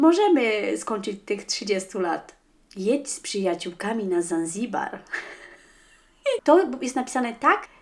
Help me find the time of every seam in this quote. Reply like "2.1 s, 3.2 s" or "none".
6.4 s